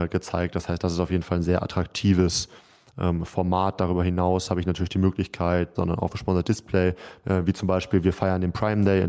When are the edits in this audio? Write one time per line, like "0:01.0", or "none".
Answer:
0:05.7
0:07.2